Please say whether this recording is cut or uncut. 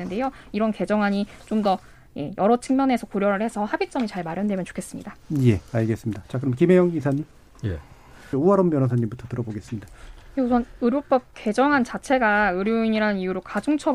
cut